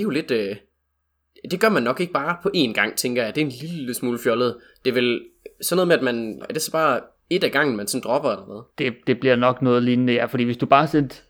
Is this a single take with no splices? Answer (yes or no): no